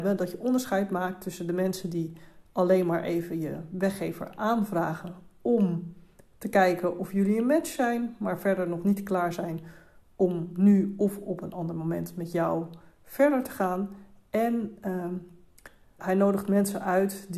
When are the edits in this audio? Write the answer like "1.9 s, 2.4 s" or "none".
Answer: 16.0 s